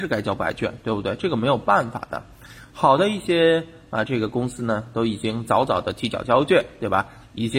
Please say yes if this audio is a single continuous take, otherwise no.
yes